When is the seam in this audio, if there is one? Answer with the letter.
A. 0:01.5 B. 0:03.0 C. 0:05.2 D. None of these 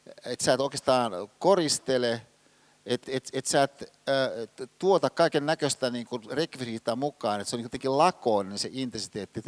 B